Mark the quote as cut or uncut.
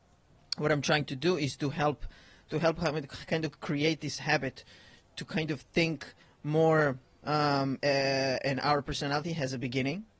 cut